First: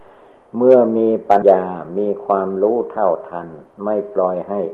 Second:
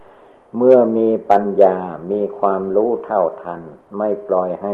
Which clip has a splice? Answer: first; 1 cut; at 1.4 s

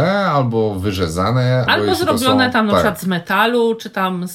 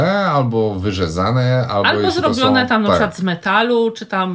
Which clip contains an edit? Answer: first; 1 cut; at 1.7 s

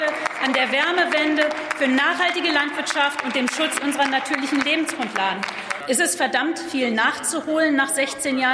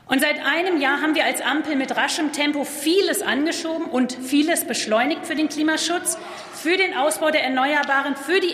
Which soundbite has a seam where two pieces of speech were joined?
first; 1 cut; at 5.8 s

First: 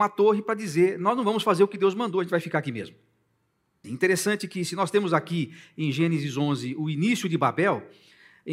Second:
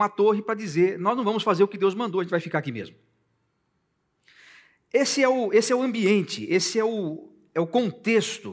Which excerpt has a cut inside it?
first; 1 cut; at 3.8 s

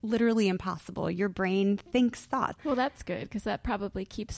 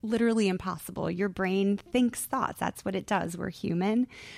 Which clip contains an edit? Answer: first; 1 cut; at 2.5 s

